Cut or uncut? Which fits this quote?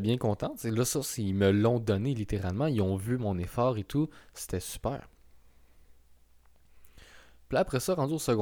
uncut